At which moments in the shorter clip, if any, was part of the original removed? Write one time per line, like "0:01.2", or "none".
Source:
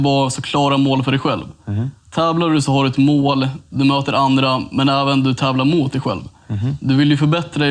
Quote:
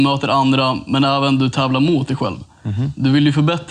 none